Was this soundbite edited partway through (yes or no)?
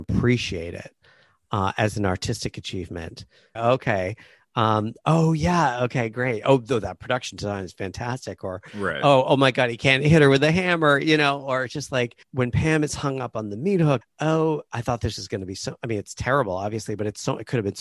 yes